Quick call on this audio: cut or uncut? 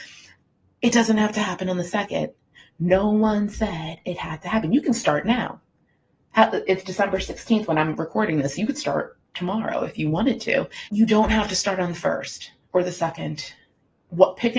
cut